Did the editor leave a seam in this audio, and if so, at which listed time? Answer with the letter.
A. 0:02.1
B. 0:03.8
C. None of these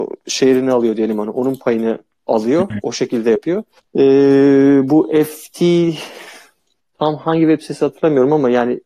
B